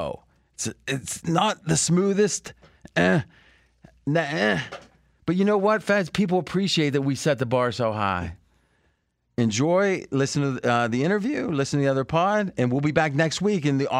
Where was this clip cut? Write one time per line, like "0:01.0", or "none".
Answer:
none